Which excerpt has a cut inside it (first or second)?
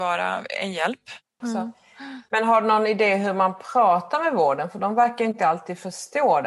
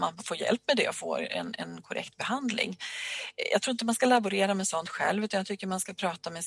first